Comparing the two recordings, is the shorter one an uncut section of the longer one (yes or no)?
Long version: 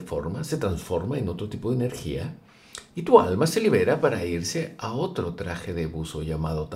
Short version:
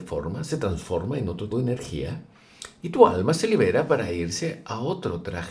no